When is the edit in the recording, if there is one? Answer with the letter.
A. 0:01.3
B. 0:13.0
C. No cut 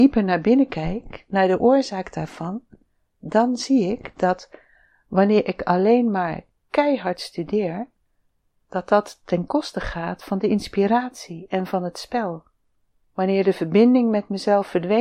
B